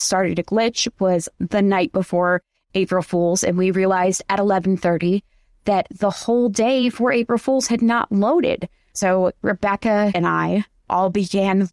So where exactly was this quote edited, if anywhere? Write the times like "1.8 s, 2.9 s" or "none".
10.1 s